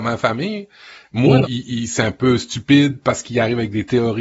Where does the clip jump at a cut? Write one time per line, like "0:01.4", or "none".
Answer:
0:01.4